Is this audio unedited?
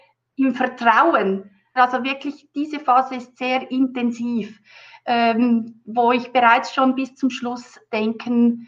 no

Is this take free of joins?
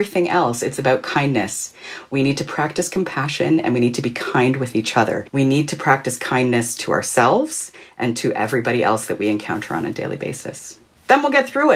no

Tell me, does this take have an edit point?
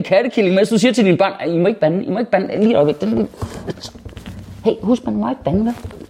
no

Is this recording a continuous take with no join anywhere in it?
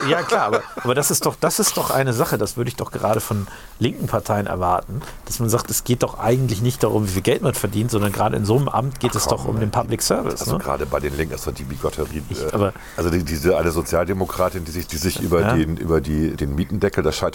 no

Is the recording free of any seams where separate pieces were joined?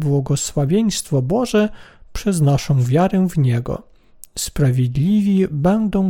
yes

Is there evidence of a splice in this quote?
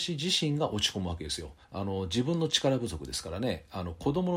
yes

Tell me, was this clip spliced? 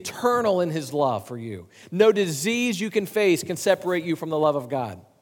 yes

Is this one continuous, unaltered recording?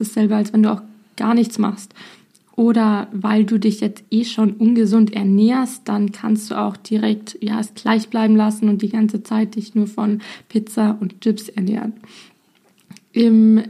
yes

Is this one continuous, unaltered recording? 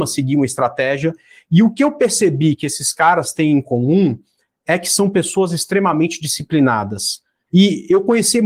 no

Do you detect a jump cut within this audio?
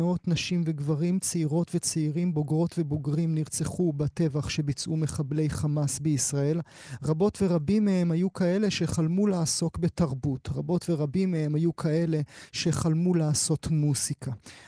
no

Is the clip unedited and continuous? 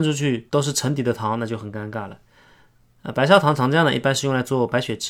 yes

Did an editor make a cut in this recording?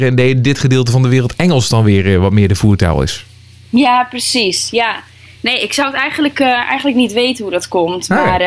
no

